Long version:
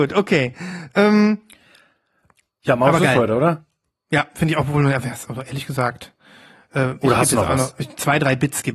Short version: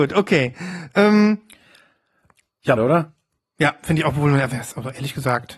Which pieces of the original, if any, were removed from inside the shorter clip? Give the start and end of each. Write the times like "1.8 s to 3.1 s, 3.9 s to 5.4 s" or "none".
2.8 s to 3.3 s